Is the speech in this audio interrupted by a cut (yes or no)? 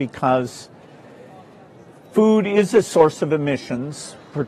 no